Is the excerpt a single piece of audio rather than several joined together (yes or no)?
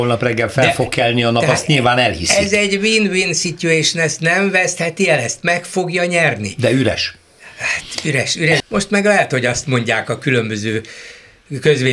no